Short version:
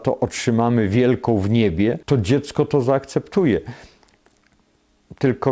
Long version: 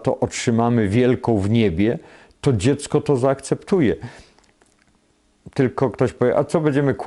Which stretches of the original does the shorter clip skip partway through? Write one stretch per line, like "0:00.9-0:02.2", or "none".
0:02.0-0:02.4